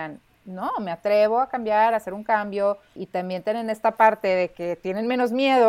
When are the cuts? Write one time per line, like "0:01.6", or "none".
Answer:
0:03.0